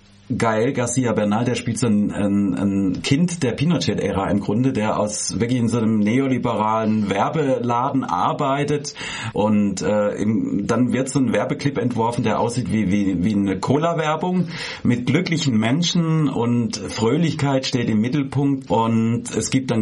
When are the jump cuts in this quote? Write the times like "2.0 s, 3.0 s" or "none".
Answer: 9.3 s, 18.7 s